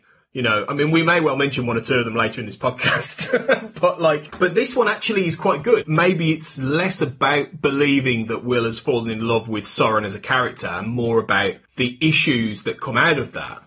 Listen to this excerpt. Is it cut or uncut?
cut